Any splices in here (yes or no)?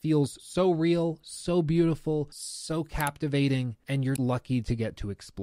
yes